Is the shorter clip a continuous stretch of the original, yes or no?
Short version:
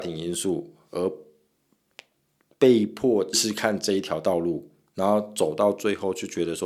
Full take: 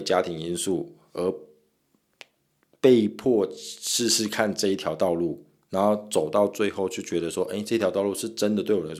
no